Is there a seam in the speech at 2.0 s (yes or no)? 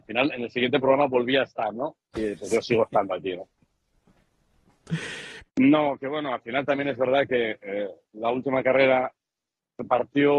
yes